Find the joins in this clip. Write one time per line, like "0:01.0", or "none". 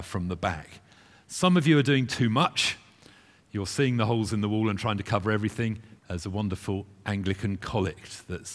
0:06.0

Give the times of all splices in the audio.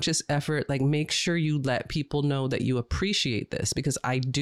none

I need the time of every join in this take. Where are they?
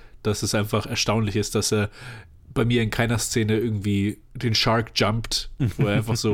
none

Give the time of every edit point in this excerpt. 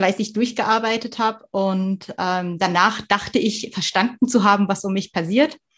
none

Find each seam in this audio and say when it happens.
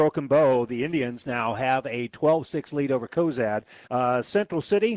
0:03.9

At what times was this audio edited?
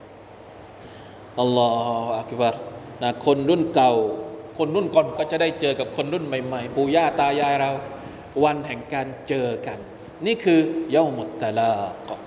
0:05.2

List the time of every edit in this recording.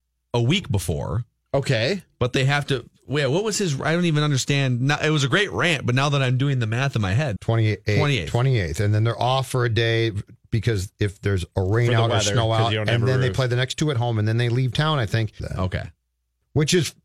0:07.4
0:15.4

